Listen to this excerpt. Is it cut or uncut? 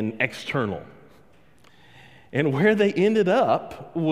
uncut